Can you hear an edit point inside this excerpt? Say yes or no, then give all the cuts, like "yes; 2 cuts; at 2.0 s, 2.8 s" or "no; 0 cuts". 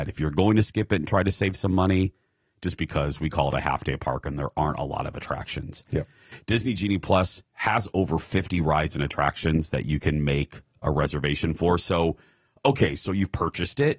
no; 0 cuts